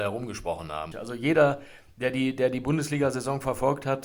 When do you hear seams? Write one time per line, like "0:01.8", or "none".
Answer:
0:00.9